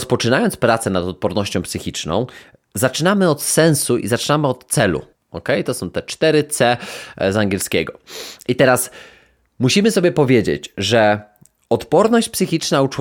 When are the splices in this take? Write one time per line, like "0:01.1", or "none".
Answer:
0:05.1